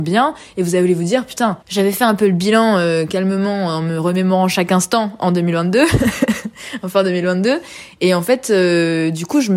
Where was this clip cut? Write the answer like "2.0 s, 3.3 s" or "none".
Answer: 1.6 s